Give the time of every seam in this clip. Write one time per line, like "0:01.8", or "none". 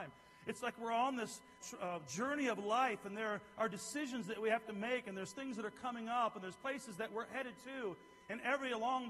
0:01.6